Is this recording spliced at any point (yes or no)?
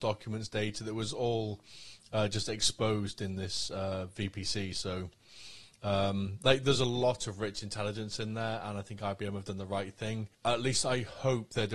yes